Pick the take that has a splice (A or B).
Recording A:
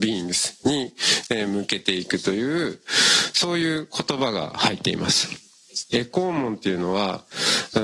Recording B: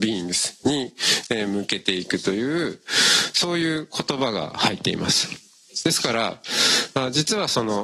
A